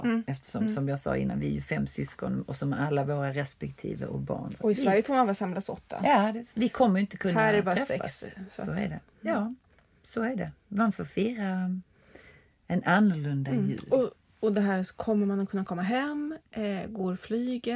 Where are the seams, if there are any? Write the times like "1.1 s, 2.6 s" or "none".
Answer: none